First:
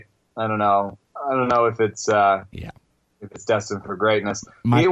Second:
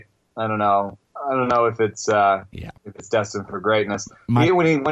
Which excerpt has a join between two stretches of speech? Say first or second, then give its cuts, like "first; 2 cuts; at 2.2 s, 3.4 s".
second; 1 cut; at 2.8 s